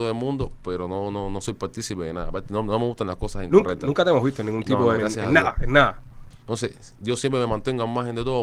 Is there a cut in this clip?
yes; 2 cuts; at 5.0 s, 6.3 s

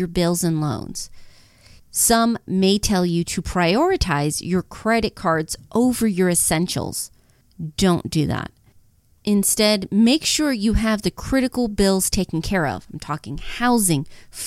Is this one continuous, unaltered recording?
no; 1 cut; at 1.8 s

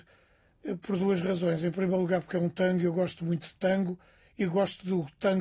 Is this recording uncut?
yes; 0 cuts

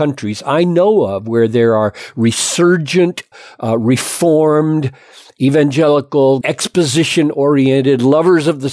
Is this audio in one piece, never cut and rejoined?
no; 1 cut; at 6.4 s

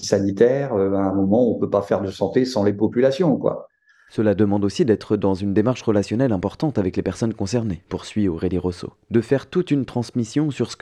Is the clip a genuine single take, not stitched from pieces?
yes; 0 cuts

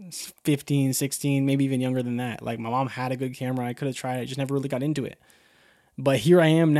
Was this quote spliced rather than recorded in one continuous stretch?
no; 0 cuts

